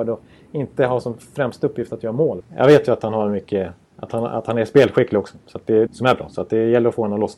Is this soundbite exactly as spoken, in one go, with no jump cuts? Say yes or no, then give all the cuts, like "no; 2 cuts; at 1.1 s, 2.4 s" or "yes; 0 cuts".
no; 2 cuts; at 2.4 s, 5.9 s